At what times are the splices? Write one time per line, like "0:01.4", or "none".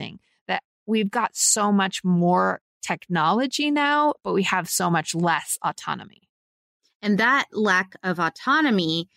none